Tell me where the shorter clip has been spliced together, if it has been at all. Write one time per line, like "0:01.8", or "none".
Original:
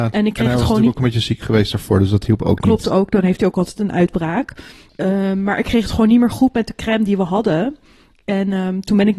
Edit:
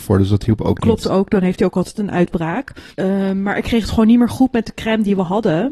0:02.9